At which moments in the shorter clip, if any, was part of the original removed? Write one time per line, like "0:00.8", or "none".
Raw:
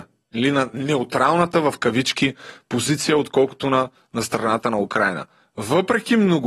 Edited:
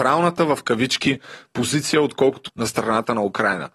0:02.5